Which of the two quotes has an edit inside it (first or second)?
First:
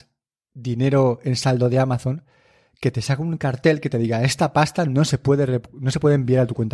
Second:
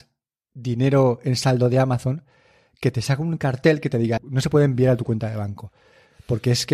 second